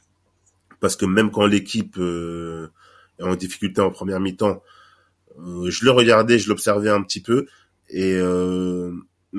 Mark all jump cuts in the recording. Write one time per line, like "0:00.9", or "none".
none